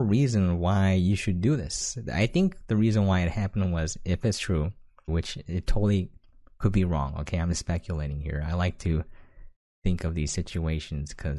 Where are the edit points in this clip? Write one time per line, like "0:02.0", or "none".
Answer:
0:05.1